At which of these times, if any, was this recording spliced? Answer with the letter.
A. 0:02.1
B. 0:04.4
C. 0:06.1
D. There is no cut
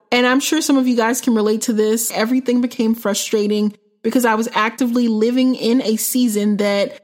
A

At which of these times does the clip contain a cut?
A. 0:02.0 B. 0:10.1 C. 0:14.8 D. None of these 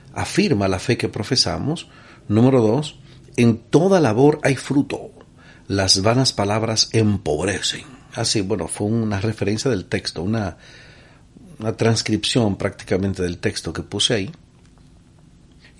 D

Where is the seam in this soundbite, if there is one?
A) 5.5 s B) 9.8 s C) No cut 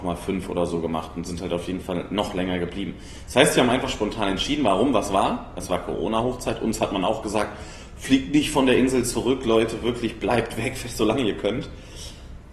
C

